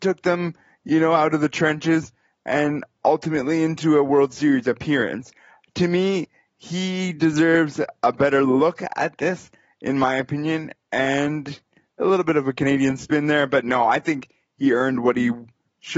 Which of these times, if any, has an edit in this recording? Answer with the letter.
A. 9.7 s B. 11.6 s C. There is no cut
C